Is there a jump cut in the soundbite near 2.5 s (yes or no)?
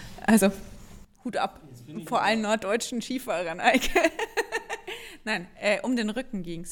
no